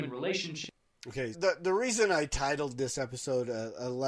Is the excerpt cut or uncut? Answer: cut